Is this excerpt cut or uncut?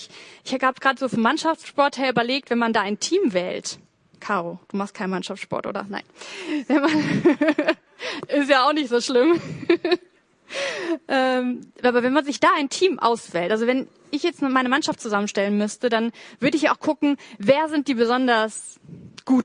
uncut